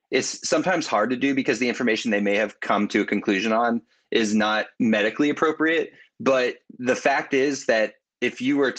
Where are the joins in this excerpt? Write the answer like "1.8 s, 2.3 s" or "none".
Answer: 4.7 s